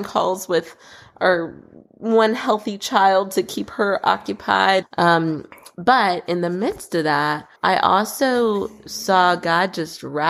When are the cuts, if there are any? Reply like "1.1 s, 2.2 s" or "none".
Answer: 4.8 s, 7.6 s